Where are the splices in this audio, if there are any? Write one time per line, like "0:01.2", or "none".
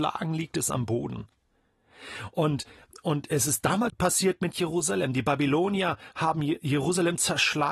0:03.9